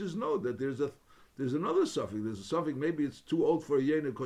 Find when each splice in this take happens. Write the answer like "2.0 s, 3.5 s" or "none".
none